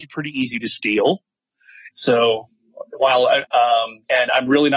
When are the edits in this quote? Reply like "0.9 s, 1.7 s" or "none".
1.9 s, 3.4 s

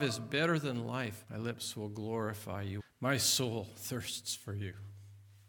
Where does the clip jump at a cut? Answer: 1.2 s, 2.8 s

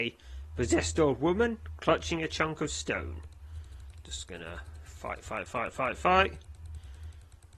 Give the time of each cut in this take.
none

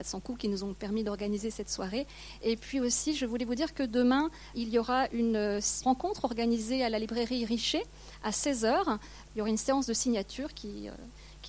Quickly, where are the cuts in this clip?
4.5 s, 5.8 s, 9.3 s

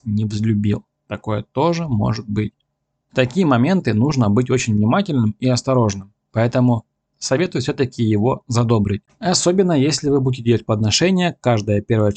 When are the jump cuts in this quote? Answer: 6.2 s, 9.1 s

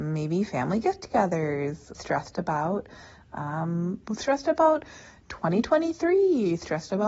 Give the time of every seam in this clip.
1.9 s, 4.0 s

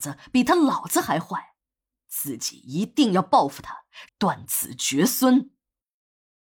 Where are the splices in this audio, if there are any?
4.1 s

